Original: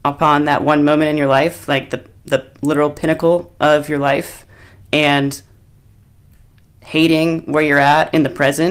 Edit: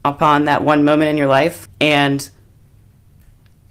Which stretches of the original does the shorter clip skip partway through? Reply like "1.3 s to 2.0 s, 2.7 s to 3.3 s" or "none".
1.7 s to 4.8 s